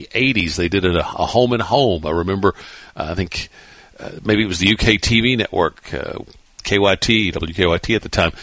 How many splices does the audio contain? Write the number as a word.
zero